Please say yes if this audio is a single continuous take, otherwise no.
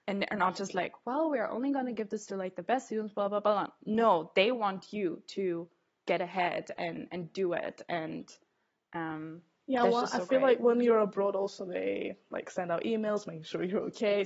no